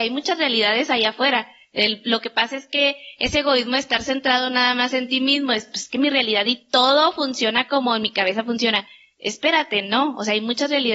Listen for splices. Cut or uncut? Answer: uncut